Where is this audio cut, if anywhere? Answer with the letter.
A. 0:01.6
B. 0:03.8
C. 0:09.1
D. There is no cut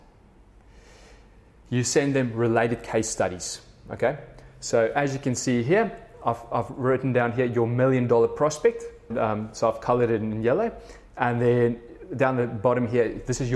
C